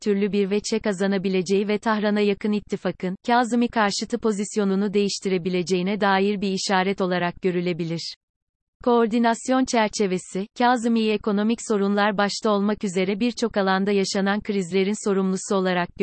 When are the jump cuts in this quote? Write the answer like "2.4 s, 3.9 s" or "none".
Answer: none